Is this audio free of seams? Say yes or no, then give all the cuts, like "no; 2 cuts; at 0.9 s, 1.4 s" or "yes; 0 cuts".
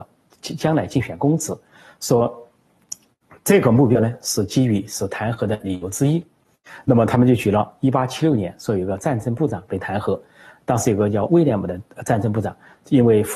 yes; 0 cuts